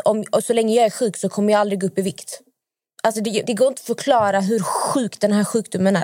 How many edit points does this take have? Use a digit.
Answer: 1